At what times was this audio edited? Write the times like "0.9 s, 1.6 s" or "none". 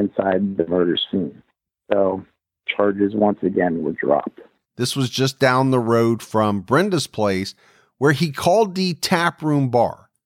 4.7 s